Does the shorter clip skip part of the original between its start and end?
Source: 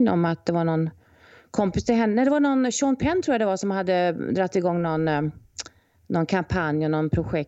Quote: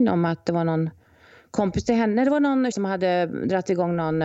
yes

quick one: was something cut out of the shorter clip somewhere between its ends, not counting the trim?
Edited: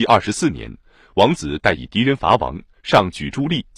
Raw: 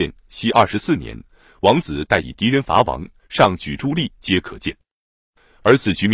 no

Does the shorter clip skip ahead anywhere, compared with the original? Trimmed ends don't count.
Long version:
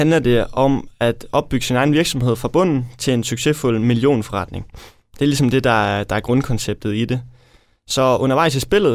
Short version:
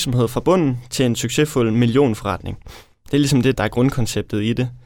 yes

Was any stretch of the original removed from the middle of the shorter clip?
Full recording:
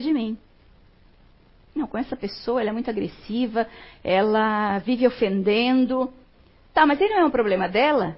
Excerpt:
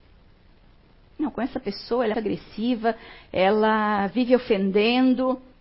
yes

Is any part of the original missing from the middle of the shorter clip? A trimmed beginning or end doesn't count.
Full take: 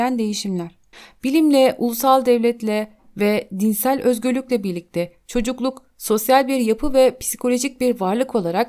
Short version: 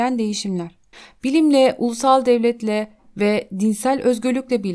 no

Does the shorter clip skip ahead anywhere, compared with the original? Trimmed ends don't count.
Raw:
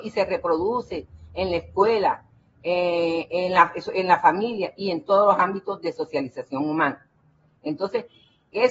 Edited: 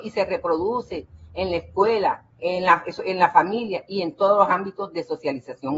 yes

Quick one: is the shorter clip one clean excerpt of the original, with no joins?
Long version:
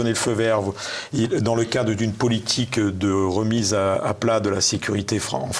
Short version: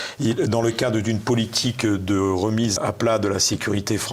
no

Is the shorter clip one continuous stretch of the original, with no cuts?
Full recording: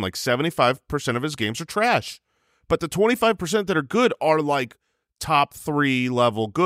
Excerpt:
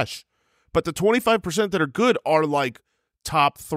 yes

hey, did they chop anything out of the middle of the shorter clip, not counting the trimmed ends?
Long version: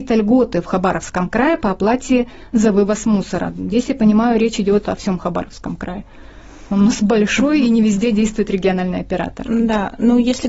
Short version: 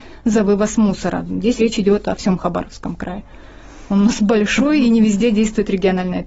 yes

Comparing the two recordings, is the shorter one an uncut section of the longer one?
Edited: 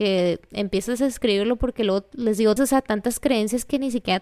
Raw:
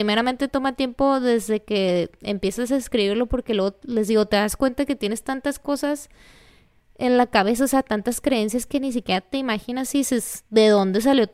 no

